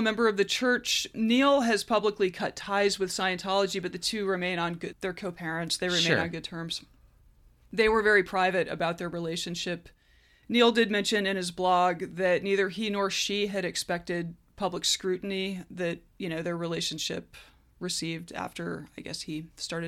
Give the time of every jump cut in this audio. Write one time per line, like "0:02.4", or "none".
0:04.9